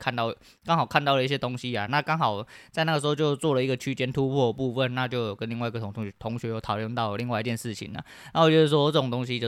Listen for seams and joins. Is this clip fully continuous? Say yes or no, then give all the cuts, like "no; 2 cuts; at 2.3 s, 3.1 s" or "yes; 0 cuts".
yes; 0 cuts